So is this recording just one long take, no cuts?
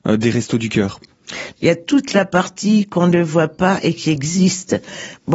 no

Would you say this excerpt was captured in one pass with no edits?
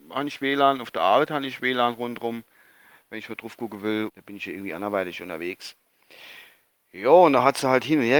no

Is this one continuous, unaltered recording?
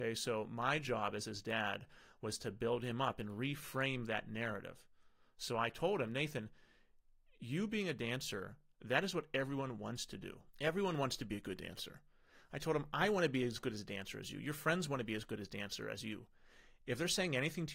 yes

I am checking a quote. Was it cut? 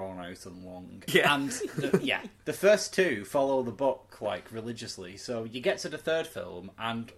yes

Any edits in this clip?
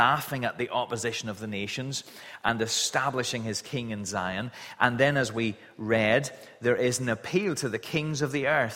no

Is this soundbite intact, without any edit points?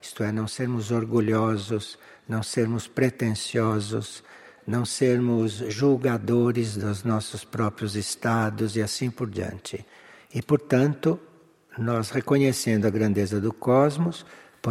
no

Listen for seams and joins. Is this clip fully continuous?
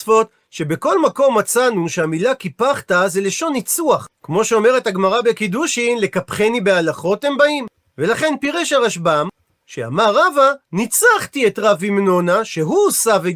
yes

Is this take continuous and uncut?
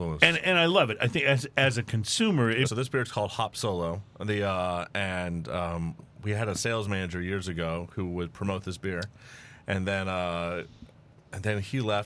no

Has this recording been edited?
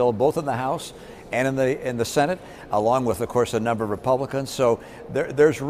no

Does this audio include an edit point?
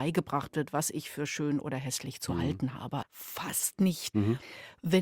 yes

